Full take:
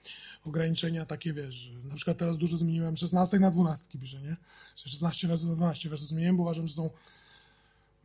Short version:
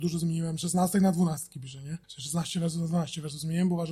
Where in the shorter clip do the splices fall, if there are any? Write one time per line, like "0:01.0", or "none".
0:02.0